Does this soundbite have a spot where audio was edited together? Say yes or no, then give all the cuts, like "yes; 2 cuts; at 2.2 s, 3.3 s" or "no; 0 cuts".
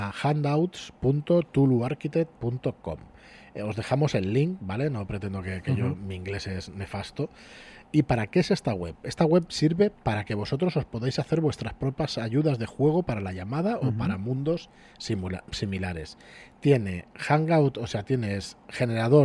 yes; 1 cut; at 7.8 s